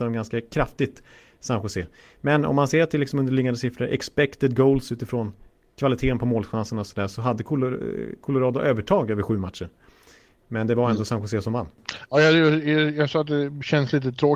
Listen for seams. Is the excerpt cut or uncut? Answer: uncut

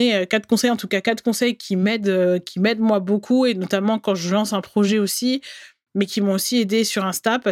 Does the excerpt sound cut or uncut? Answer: uncut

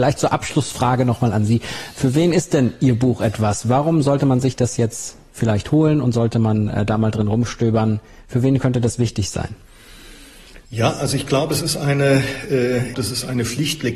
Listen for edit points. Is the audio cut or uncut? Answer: cut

